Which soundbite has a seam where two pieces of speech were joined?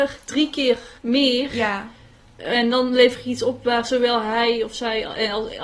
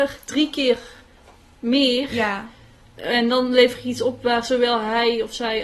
first; 1 cut; at 1.0 s

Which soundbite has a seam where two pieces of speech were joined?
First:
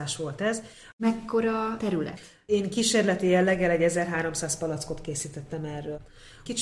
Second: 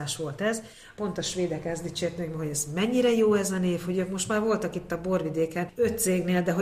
first; 1 cut; at 0.9 s

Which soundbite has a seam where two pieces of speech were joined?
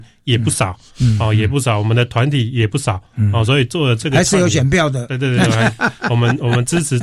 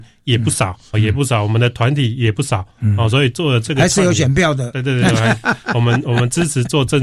second; 1 cut; at 0.9 s

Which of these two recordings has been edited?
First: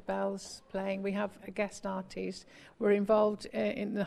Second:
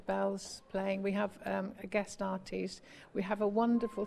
first; 2 cuts; at 1.4 s, 2.7 s

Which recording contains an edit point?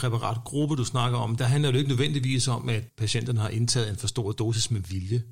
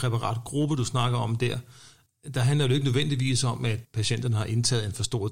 first; 1 cut; at 1.4 s

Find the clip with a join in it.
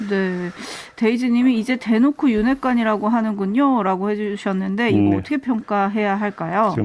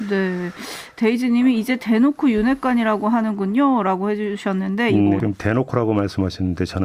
second; 1 cut; at 5.2 s

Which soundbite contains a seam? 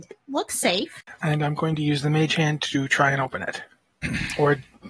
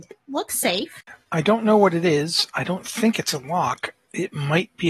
first; 1 cut; at 1.2 s

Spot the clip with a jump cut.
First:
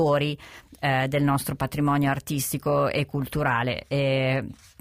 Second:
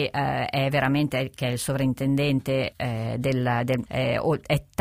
second; 2 cuts; at 2.7 s, 3.9 s

